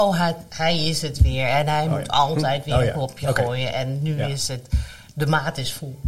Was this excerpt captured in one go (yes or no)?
yes